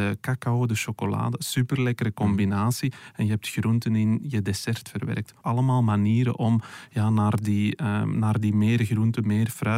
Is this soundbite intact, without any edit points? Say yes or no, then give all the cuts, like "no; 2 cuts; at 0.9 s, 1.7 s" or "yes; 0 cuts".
no; 1 cut; at 5.4 s